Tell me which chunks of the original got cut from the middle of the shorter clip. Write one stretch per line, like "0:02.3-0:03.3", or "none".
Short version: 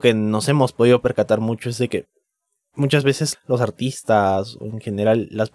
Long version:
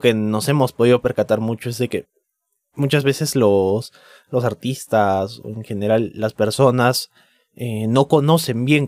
0:03.3-0:04.2